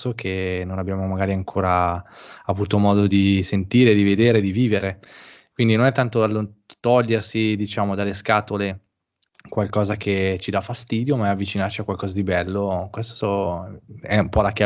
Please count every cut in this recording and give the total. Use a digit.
0